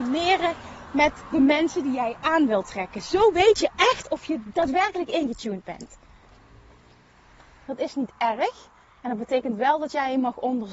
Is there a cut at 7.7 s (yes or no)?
yes